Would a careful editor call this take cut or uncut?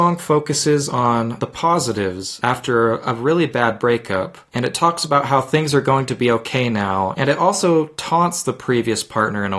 uncut